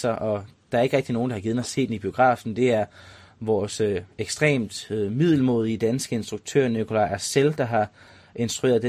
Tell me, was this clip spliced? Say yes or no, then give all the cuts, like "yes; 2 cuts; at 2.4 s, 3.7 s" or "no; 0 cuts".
no; 0 cuts